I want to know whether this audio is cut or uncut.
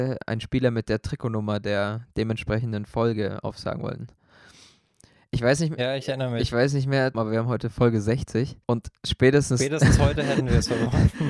cut